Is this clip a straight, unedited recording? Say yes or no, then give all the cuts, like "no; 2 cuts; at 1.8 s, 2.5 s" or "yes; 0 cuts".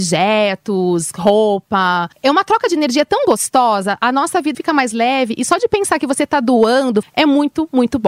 no; 3 cuts; at 2.1 s, 4.5 s, 7.0 s